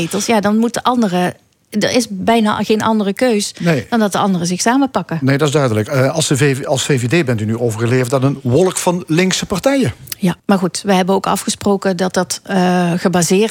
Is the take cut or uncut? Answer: cut